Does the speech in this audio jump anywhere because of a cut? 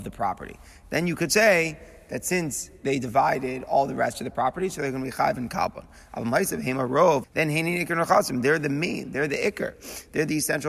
yes; 1 cut; at 7.2 s

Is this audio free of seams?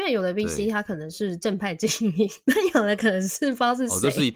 yes; 0 cuts

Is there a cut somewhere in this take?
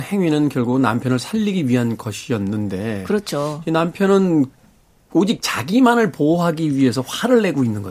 no; 0 cuts

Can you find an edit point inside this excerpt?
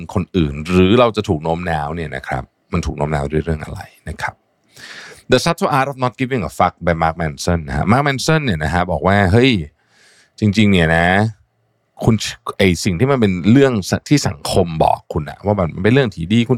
no; 0 cuts

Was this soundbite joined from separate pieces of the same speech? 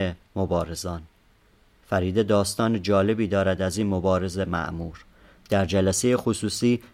no; 0 cuts

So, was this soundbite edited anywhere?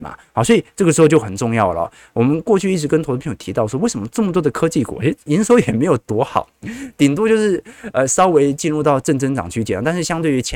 no; 0 cuts

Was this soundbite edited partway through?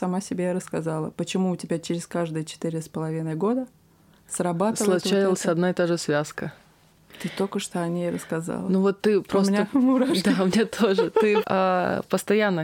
yes; 1 cut; at 11.4 s

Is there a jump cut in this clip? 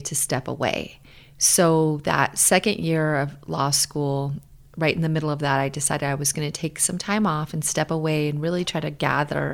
no; 0 cuts

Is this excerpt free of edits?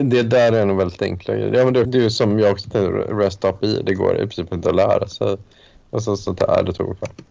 no; 1 cut; at 1.8 s

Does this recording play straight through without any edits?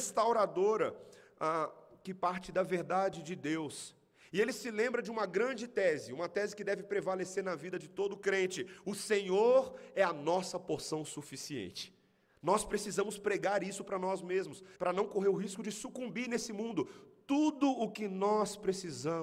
no; 1 cut; at 14.8 s

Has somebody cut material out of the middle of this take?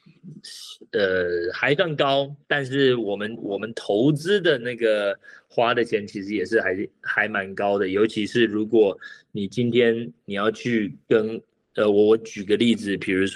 no; 0 cuts

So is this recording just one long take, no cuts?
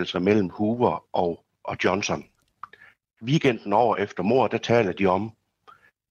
yes; 0 cuts

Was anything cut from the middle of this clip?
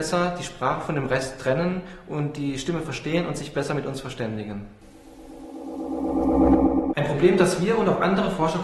yes; 1 cut; at 6.9 s

